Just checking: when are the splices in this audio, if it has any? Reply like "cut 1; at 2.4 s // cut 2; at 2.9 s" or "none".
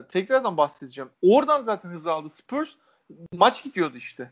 cut 1; at 1.1 s